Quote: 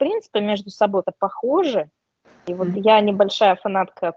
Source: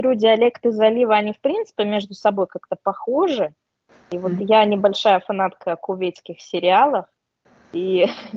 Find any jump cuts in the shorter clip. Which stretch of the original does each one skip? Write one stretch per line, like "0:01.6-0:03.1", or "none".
0:02.5-0:02.7